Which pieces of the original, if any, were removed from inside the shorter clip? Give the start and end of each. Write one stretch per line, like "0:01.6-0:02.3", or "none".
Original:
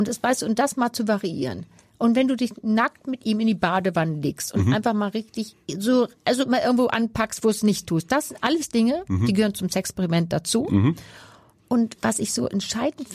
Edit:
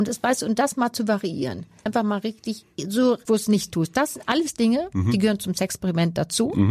0:01.9-0:04.8
0:06.2-0:07.4